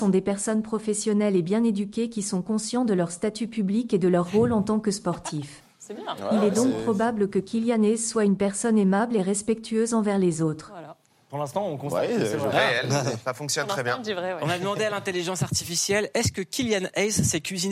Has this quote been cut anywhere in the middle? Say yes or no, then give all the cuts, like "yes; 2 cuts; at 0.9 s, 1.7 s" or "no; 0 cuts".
no; 0 cuts